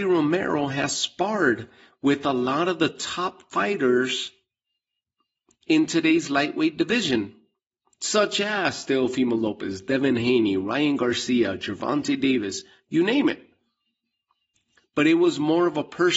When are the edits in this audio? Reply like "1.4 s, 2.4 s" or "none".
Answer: none